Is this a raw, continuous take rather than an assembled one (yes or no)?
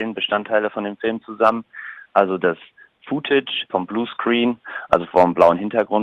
no